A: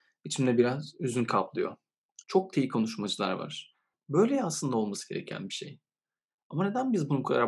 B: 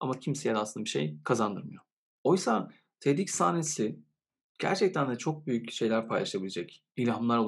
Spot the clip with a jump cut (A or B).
A